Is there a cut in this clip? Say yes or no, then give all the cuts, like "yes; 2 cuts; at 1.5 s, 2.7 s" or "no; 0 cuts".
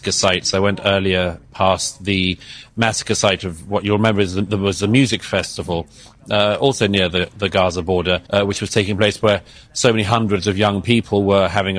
yes; 1 cut; at 8.3 s